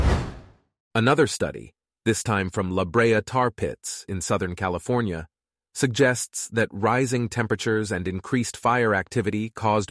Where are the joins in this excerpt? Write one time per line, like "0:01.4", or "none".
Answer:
none